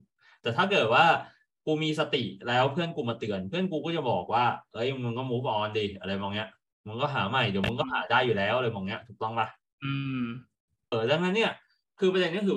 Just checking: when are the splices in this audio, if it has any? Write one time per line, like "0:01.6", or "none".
0:10.9